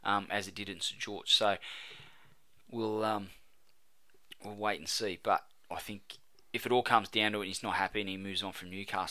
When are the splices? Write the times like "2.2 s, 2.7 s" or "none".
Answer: none